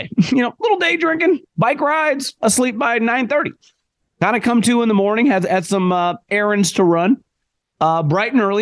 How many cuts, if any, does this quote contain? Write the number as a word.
one